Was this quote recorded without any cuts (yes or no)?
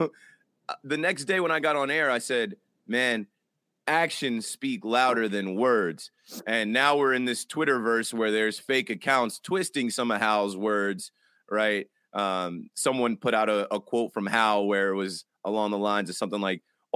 yes